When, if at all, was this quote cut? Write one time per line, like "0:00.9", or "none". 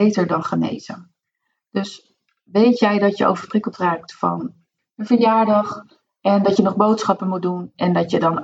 none

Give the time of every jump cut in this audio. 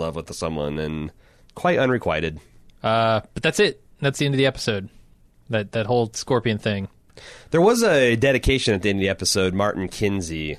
0:02.7

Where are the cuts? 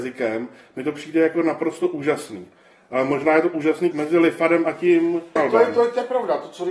0:03.9
0:05.4

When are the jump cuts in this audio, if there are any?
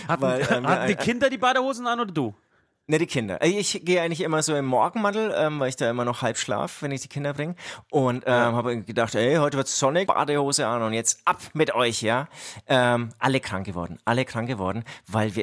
0:10.1

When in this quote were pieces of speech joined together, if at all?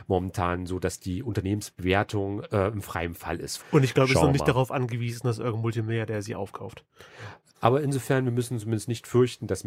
0:03.6
0:07.5

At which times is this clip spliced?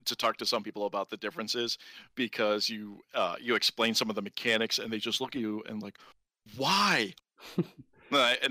0:07.2

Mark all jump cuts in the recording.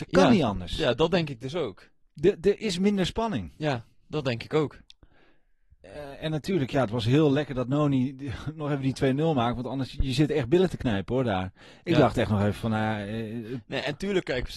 none

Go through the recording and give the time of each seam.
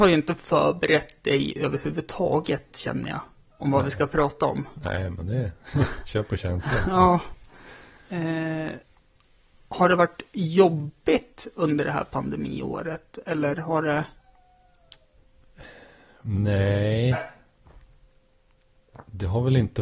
none

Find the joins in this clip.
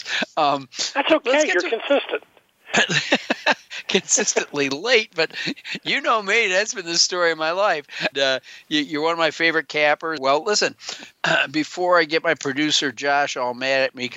0:08.1
0:10.2

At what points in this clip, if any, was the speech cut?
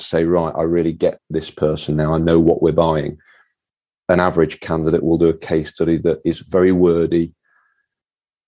0:01.2

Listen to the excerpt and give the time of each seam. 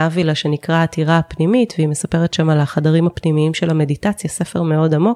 none

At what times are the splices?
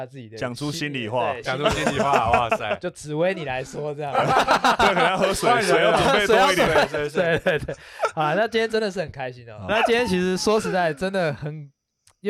0:09.7

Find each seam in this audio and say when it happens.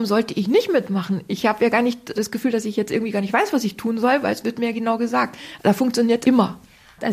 0:02.1
0:06.2

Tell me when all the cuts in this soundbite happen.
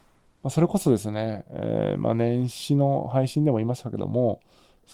none

